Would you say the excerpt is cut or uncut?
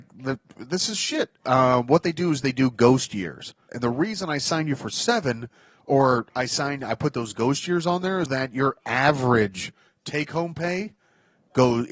cut